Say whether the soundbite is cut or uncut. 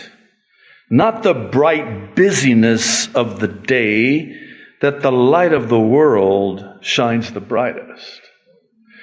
uncut